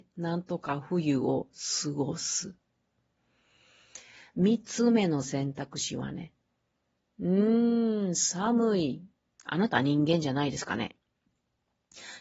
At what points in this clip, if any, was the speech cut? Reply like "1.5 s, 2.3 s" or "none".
9.3 s